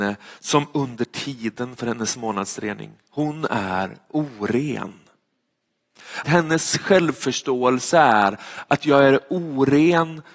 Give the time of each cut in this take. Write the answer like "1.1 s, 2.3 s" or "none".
6.2 s